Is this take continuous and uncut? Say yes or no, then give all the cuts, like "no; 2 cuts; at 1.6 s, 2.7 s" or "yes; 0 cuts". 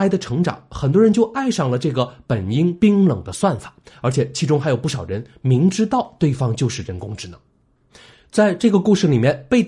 yes; 0 cuts